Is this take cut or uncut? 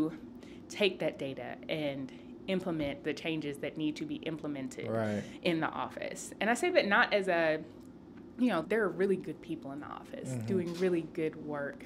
cut